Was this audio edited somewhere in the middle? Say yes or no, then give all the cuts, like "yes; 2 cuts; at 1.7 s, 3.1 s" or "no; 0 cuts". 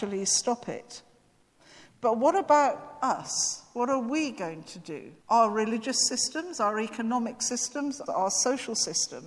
yes; 2 cuts; at 5.2 s, 8.1 s